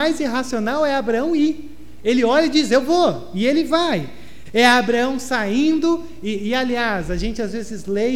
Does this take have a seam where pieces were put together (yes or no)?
yes